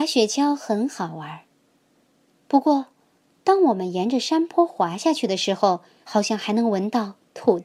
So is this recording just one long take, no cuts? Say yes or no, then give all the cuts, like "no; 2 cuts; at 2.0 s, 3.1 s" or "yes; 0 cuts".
no; 1 cut; at 6.0 s